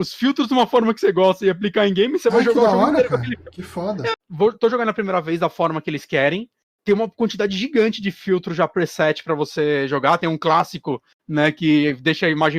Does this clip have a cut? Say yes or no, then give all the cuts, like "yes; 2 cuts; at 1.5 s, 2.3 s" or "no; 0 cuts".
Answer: yes; 1 cut; at 4.1 s